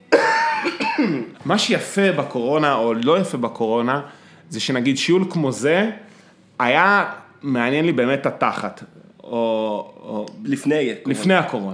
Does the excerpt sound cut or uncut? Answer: cut